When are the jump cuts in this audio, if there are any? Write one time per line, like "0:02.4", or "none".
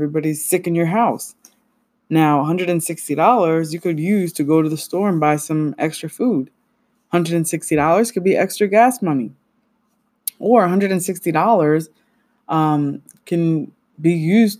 none